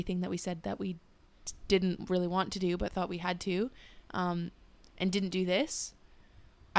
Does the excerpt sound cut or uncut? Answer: uncut